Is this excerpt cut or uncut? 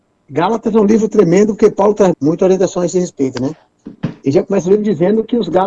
cut